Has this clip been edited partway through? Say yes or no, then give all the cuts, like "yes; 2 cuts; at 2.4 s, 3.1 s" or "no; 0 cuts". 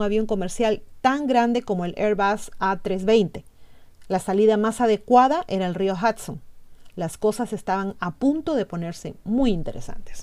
no; 0 cuts